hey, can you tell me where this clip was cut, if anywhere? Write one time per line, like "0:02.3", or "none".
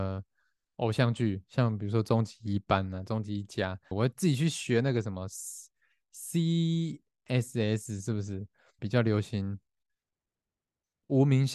0:03.9
0:08.8